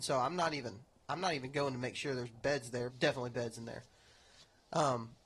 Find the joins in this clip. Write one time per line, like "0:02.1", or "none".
0:02.9